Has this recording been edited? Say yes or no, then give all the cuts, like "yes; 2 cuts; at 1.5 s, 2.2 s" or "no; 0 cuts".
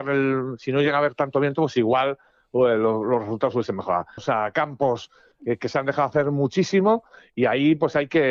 yes; 1 cut; at 4.2 s